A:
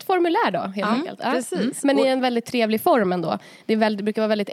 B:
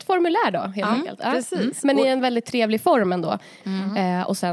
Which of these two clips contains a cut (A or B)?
B